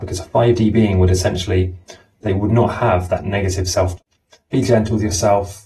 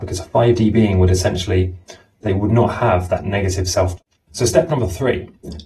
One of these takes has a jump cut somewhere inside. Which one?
second; 1 cut; at 4.3 s

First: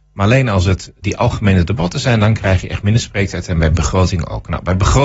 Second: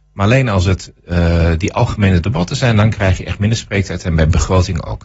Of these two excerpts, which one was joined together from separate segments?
first; 1 cut; at 1.0 s

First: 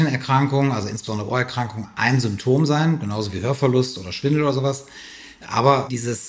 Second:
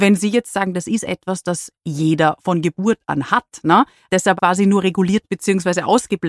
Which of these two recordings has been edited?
second; 1 cut; at 4.4 s

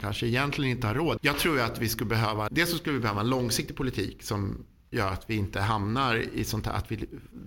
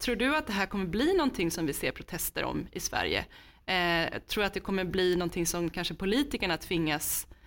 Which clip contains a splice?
first; 2 cuts; at 1.2 s, 2.5 s

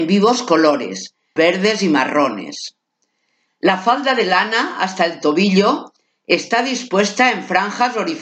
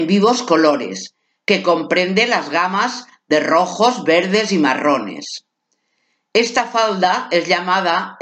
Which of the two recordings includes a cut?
first; 2 cuts; at 1.4 s, 3.5 s

